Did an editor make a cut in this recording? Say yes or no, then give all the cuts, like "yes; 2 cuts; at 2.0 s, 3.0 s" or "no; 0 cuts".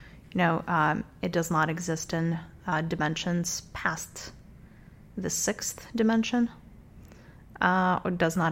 no; 0 cuts